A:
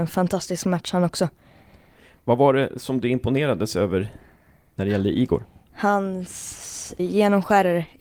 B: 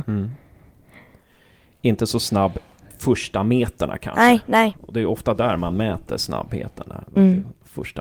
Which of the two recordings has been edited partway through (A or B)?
A